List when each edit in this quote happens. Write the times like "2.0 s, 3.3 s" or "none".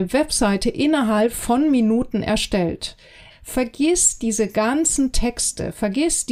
3.3 s